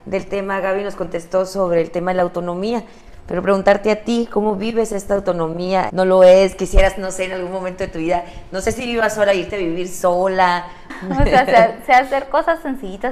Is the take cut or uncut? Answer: cut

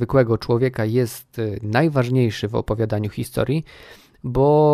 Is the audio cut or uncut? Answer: uncut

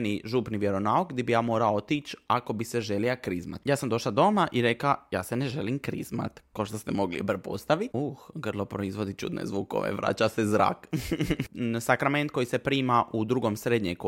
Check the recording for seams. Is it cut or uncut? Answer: cut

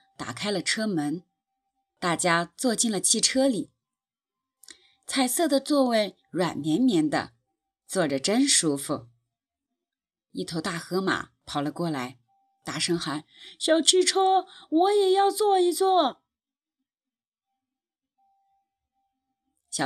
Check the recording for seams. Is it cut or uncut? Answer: uncut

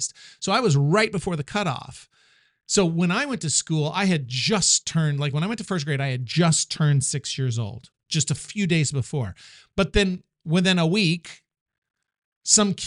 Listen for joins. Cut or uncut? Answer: uncut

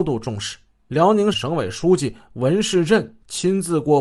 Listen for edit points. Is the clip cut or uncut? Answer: cut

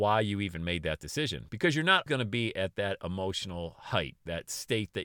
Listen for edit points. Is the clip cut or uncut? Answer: cut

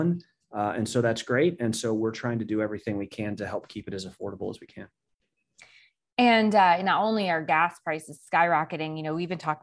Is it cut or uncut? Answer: uncut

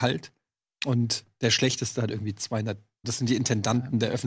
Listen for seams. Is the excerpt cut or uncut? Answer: cut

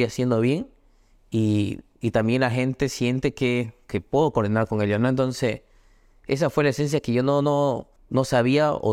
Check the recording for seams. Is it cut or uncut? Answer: cut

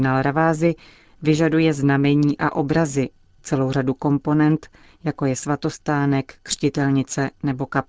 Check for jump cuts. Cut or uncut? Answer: uncut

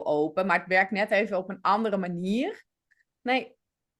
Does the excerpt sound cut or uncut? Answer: cut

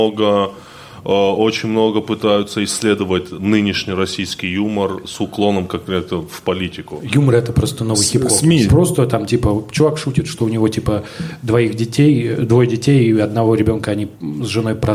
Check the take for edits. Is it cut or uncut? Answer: cut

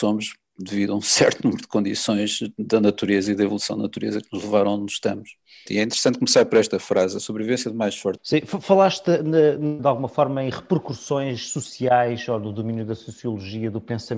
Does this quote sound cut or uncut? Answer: cut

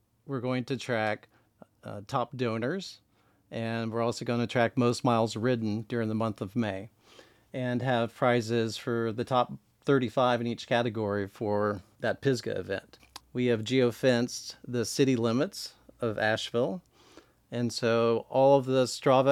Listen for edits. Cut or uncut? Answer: cut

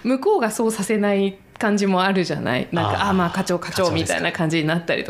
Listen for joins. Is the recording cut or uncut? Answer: uncut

